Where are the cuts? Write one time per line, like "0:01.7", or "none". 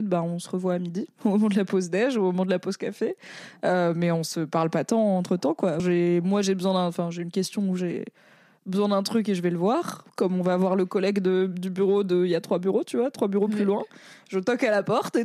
0:05.8